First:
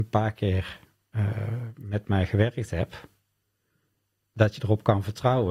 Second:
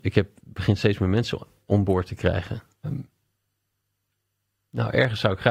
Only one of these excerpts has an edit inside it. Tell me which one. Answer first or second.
second